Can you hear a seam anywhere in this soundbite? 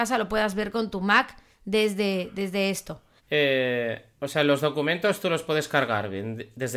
yes; 1 cut; at 3.2 s

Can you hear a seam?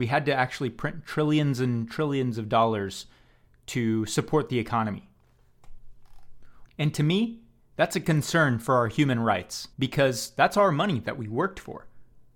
yes; 2 cuts; at 6.6 s, 9.7 s

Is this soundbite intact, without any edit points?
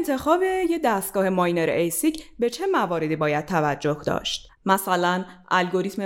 no; 1 cut; at 4.6 s

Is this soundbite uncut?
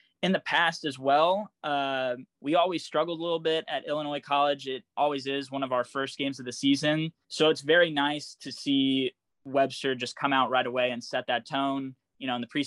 no; 2 cuts; at 2.3 s, 7.2 s

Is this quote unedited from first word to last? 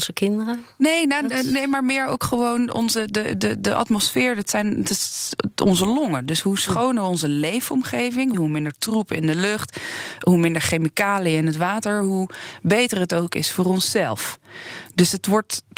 no; 1 cut; at 8.3 s

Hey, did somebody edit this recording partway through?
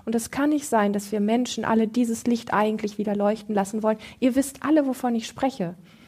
no; 0 cuts

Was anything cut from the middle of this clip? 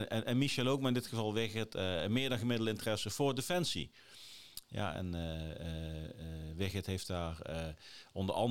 no; 0 cuts

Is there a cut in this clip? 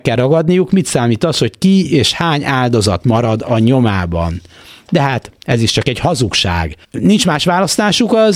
yes; 1 cut; at 6.8 s

